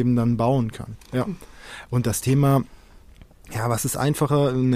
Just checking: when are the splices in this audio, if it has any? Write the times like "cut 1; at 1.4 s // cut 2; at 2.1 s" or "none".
cut 1; at 0.9 s